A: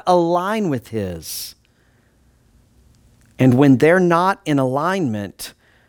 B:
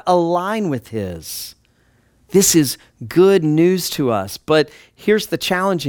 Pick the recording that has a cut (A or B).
B